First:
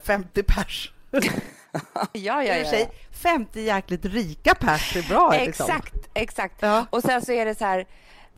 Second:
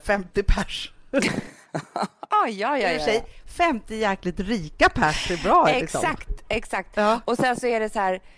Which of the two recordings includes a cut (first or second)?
first